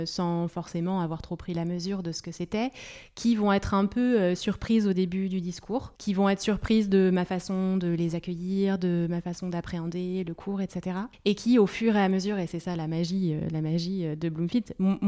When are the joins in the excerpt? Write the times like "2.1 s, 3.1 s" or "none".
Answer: 6.0 s, 14.2 s